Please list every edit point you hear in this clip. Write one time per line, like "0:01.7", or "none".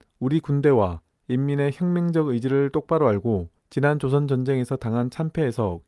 0:03.6

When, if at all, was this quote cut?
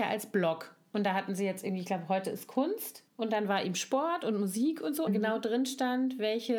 0:03.1
0:05.1

